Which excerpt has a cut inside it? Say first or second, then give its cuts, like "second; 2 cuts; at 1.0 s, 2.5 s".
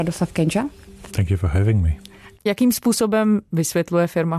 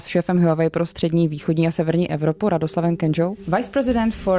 first; 2 cuts; at 1.1 s, 2.3 s